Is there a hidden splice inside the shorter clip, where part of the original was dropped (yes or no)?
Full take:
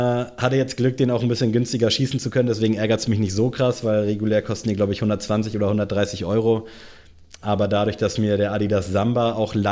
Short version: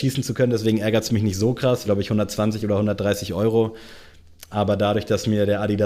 yes